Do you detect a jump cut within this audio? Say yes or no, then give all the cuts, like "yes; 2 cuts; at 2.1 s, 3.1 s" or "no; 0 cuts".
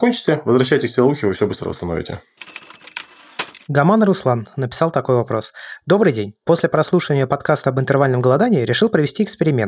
no; 0 cuts